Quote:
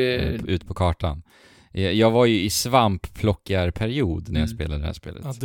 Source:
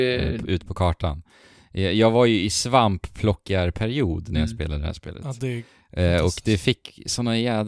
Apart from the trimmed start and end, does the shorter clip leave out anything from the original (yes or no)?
no